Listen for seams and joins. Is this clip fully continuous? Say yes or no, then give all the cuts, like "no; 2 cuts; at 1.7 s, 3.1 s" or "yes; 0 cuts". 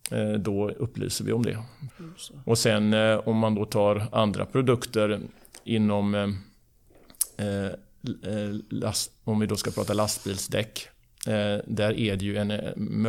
no; 1 cut; at 1.9 s